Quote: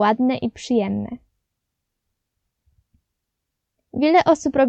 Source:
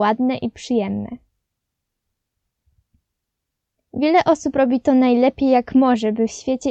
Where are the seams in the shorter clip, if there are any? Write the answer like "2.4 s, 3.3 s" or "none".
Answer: none

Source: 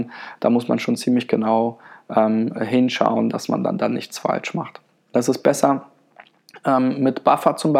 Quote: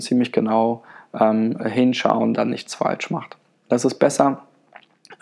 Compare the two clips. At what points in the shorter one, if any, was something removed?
2.3 s

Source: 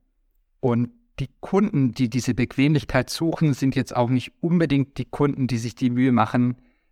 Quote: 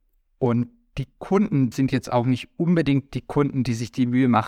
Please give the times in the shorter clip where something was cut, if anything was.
1.7 s

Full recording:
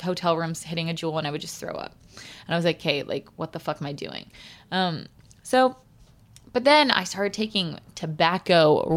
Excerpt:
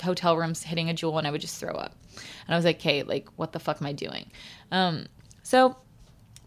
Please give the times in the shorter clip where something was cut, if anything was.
none

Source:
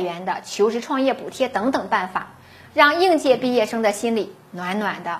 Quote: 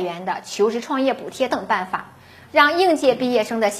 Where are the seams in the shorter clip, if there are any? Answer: 1.5 s

